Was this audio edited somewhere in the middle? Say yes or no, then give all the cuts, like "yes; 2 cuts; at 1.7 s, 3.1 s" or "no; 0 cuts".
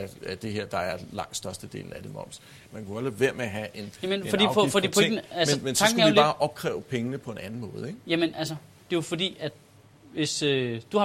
yes; 1 cut; at 2.7 s